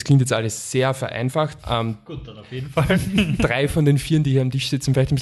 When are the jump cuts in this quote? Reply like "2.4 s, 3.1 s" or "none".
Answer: 1.6 s